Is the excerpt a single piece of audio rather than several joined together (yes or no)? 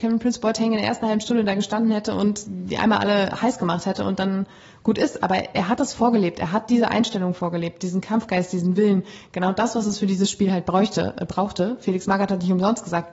yes